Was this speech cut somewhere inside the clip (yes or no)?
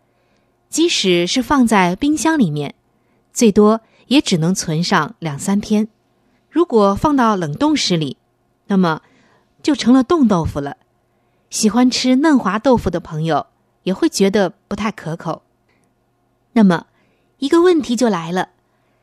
yes